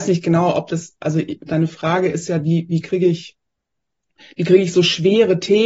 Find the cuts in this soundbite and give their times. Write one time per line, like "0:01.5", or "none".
0:01.4